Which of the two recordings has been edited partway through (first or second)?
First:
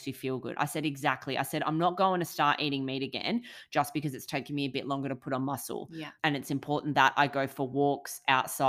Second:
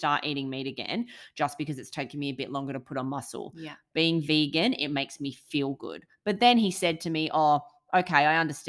first